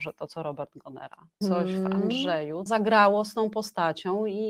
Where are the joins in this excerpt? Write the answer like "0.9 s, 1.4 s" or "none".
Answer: 1.4 s, 2.7 s